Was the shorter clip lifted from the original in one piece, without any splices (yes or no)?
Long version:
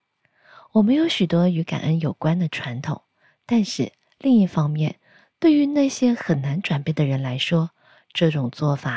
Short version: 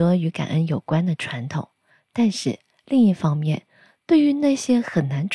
yes